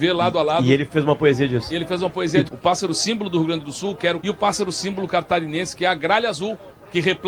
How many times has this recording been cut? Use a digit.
2